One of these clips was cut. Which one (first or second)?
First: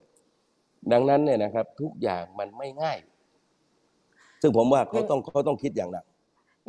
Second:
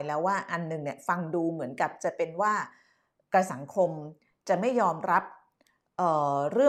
second